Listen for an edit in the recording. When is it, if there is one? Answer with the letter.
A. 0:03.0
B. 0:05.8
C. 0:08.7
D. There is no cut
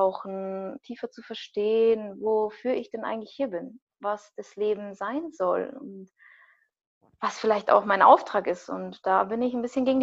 D